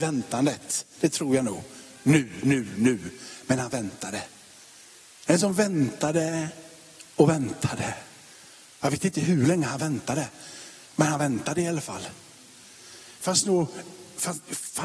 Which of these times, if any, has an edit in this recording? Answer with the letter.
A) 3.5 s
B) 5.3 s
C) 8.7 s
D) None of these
B